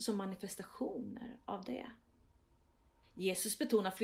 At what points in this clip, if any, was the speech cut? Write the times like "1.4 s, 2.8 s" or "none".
3.0 s